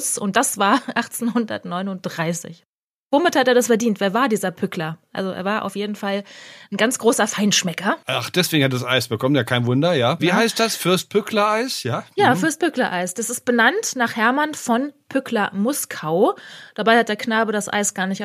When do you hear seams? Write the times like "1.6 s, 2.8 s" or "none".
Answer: 10.2 s

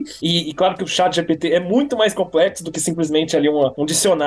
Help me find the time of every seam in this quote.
none

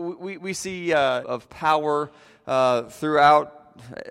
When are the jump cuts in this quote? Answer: 1.2 s

